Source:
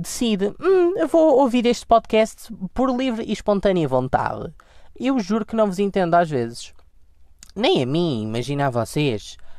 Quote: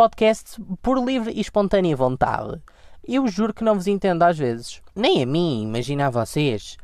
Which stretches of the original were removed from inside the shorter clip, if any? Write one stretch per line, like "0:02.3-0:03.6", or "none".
0:06.8-0:07.5